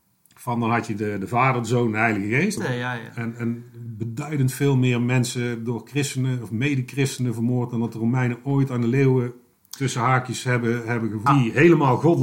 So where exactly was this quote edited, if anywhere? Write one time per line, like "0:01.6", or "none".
0:02.6
0:11.3